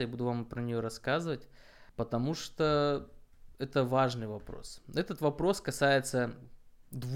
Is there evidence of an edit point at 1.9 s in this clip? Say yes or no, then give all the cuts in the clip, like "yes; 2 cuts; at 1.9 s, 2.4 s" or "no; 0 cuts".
yes; 1 cut; at 1.9 s